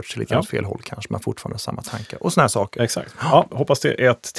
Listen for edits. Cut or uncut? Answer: cut